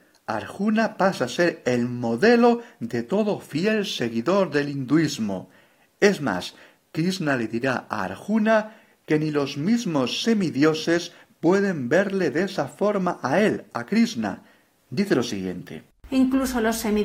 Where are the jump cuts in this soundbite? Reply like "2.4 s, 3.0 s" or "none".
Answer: 16.1 s